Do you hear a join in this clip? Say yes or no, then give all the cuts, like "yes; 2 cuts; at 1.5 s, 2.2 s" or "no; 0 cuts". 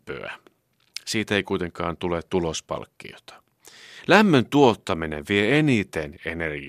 no; 0 cuts